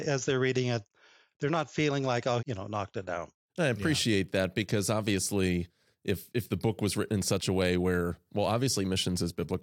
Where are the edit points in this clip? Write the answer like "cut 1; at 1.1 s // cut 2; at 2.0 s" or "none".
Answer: cut 1; at 2.4 s